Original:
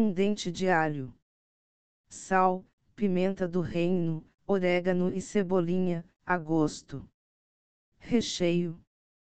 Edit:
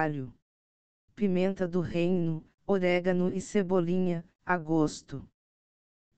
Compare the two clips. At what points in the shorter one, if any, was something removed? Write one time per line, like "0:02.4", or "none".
0:01.1

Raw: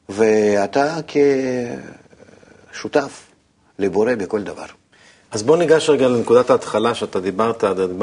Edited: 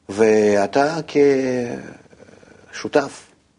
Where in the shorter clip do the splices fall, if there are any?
none

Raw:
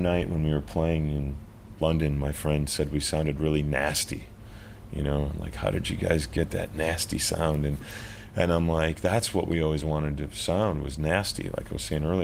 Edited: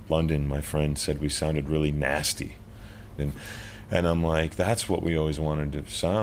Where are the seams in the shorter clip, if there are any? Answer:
0:03.2

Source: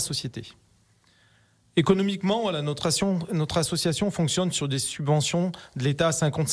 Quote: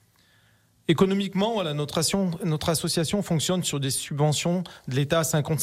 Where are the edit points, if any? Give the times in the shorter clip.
none

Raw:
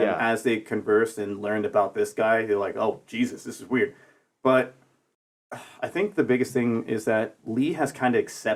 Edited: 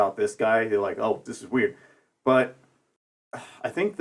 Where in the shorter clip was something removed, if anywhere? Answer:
0:01.3

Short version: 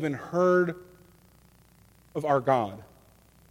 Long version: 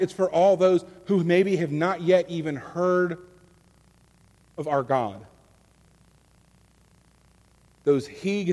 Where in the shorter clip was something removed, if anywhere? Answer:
none

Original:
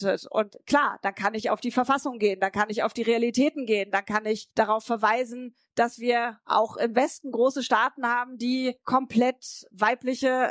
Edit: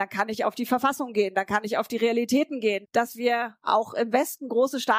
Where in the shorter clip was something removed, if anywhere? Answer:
0:02.8

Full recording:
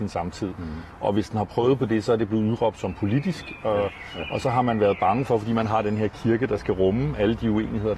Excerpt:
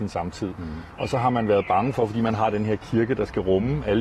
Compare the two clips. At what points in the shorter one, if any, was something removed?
0:01.0

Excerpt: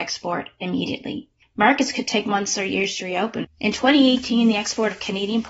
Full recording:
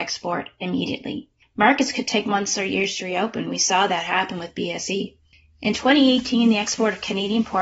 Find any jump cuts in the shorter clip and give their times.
0:03.4

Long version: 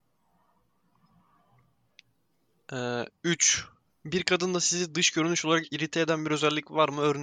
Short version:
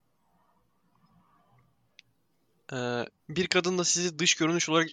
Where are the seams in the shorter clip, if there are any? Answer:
0:03.2

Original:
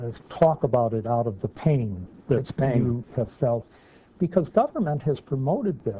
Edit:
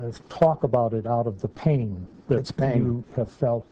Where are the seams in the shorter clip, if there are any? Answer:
none

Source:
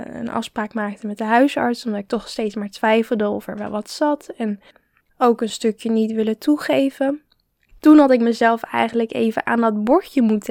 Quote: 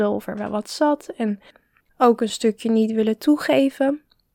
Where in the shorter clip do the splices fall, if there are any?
none

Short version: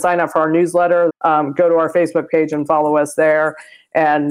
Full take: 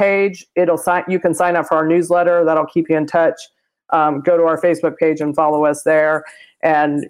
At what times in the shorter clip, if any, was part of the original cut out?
0:01.1

